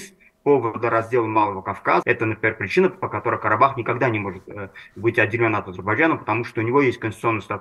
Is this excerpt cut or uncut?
cut